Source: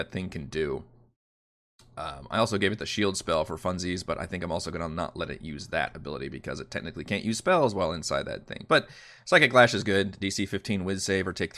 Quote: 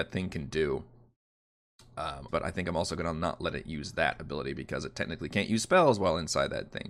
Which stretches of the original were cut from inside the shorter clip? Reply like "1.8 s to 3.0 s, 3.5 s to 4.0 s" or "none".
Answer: 2.3 s to 4.0 s